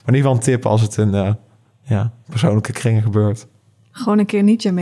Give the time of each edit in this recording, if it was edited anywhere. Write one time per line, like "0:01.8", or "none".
none